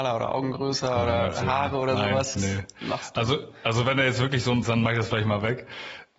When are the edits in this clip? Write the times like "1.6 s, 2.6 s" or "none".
2.4 s, 4.6 s